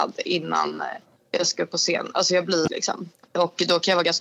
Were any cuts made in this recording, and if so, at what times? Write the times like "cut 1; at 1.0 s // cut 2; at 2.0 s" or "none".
cut 1; at 2.7 s